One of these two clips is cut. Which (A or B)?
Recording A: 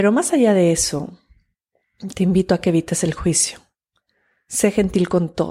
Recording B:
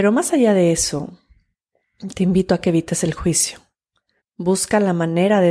B